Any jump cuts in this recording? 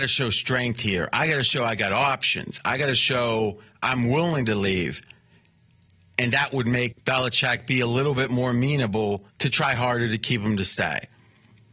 yes; 2 cuts; at 6.9 s, 9.3 s

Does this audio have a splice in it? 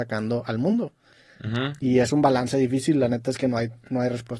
no; 0 cuts

